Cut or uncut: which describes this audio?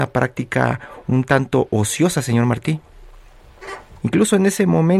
cut